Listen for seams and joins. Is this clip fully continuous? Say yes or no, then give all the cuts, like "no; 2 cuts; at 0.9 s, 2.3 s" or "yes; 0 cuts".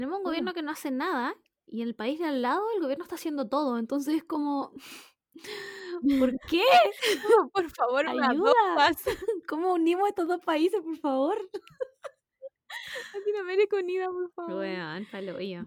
yes; 0 cuts